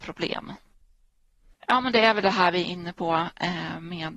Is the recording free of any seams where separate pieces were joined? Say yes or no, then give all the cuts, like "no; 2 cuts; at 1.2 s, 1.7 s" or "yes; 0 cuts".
no; 1 cut; at 1.5 s